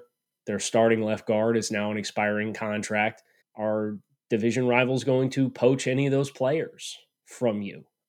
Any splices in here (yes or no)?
yes